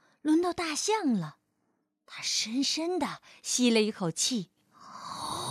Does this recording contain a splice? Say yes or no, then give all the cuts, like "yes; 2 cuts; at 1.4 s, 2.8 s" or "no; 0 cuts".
no; 0 cuts